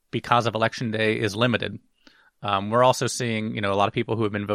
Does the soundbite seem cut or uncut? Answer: uncut